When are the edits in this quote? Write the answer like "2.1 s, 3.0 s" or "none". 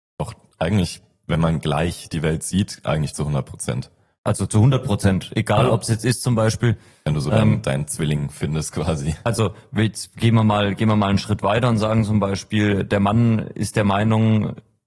none